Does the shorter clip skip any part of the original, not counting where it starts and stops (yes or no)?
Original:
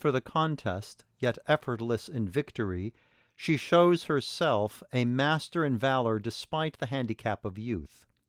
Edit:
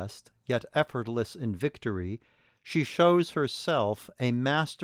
no